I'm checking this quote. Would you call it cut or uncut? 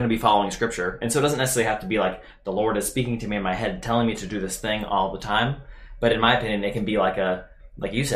uncut